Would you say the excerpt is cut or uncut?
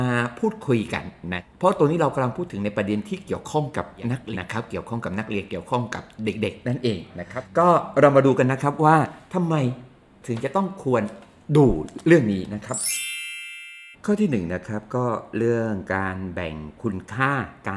cut